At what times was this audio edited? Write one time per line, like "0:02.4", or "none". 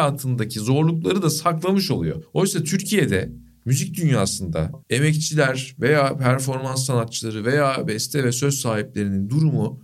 0:04.8